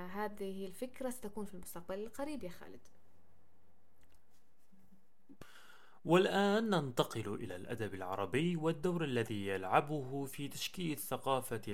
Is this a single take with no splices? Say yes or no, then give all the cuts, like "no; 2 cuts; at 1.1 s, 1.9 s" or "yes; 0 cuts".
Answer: yes; 0 cuts